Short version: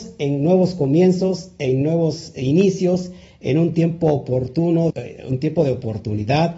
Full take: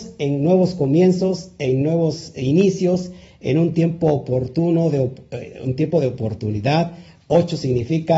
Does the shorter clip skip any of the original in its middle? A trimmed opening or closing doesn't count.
yes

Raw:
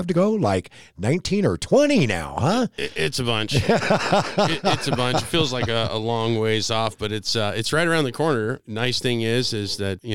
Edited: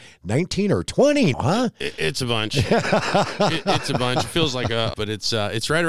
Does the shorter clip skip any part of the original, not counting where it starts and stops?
yes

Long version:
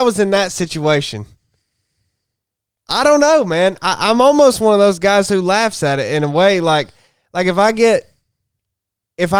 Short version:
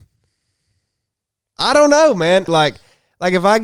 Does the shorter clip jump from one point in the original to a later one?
yes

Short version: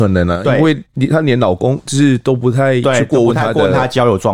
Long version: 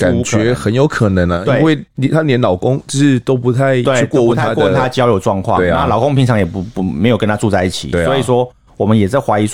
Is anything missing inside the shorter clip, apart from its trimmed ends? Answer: no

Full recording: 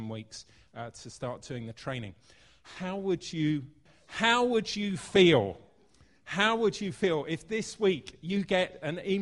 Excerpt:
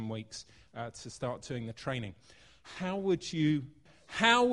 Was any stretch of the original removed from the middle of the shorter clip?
no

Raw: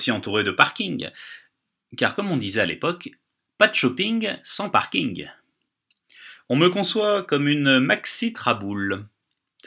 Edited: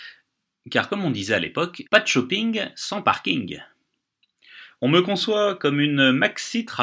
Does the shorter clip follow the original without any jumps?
no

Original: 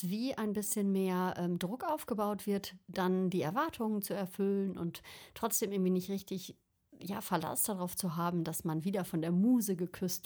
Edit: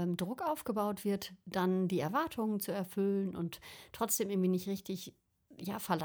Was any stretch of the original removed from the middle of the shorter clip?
no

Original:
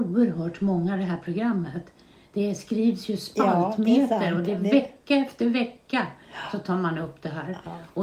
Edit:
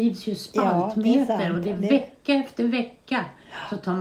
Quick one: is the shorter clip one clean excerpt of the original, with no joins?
yes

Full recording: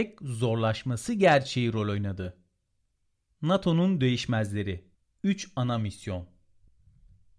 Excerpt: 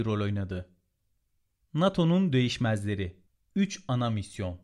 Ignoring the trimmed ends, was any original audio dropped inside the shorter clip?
no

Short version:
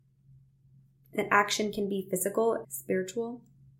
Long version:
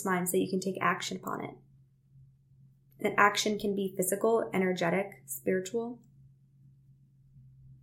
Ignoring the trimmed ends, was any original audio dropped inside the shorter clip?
yes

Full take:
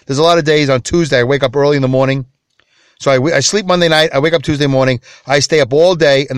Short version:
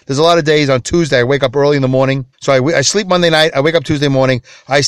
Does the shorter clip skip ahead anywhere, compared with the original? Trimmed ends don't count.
yes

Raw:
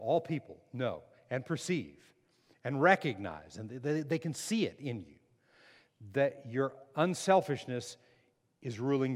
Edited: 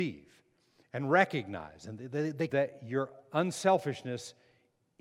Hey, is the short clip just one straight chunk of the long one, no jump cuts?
no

